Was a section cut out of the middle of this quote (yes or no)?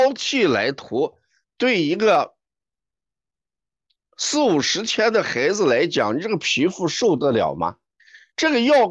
no